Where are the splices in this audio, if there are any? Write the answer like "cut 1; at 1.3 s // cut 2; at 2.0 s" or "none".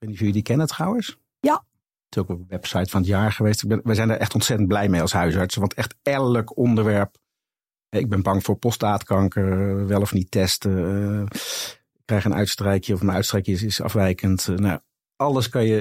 none

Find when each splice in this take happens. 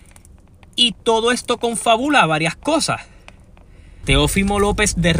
cut 1; at 4.0 s

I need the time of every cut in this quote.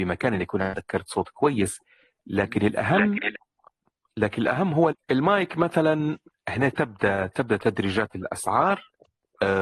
cut 1; at 4.9 s

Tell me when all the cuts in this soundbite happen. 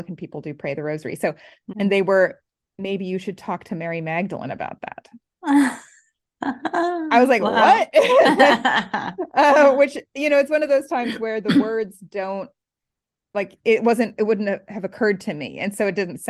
cut 1; at 1.7 s

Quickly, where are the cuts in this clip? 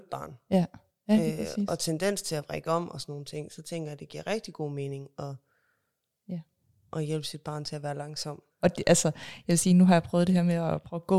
cut 1; at 8.5 s

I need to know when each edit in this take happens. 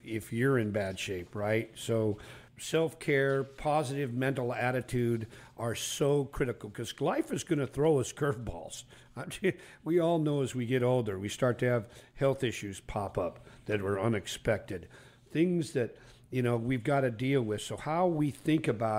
cut 1; at 2.5 s

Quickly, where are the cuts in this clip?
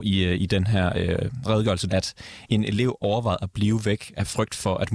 cut 1; at 1.9 s

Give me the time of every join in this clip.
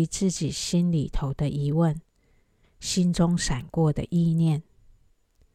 cut 1; at 2.6 s

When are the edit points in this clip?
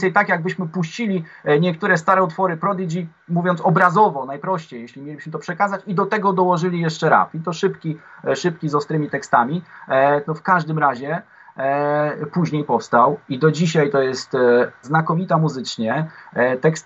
cut 1; at 10.2 s // cut 2; at 14.8 s

